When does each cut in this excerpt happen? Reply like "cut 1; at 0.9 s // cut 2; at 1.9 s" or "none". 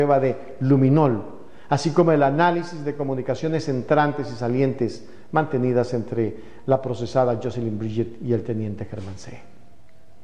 none